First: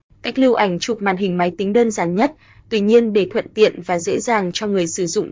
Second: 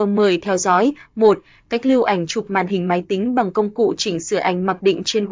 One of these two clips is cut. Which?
first; 1 cut; at 2.5 s

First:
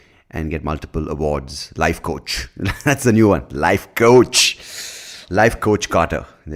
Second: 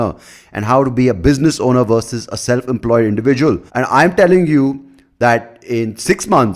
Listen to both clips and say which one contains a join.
second; 1 cut; at 3.7 s

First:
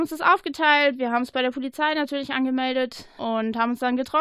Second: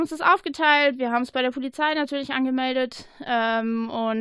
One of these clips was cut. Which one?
first; 1 cut; at 3.2 s

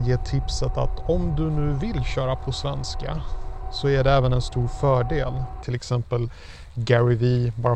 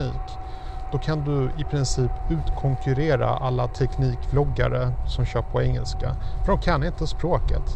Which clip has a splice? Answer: first; 1 cut; at 5.6 s

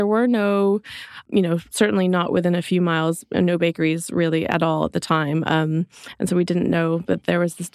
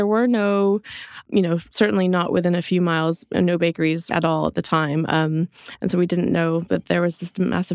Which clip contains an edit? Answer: second; 1 cut; at 4.1 s

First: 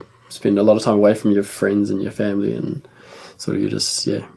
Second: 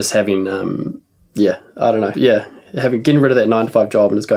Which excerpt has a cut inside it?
second; 1 cut; at 2.1 s

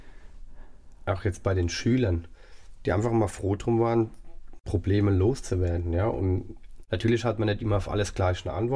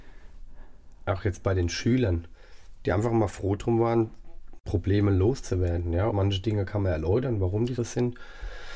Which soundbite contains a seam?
second; 2 cuts; at 6.1 s, 7.8 s

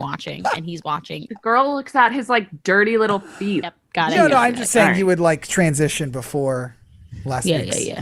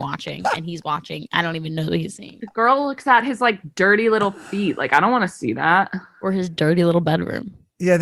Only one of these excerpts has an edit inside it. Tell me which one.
first; 2 cuts; at 1.3 s, 3.6 s

